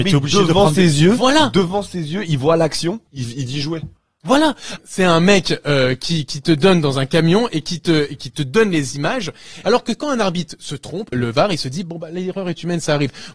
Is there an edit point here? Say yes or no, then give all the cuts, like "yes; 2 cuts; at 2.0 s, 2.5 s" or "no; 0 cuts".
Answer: yes; 3 cuts; at 3.1 s, 9.6 s, 11.1 s